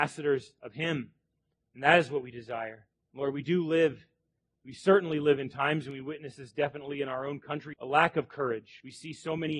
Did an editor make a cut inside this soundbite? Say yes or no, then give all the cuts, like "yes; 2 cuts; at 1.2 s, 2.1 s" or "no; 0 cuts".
yes; 1 cut; at 7.7 s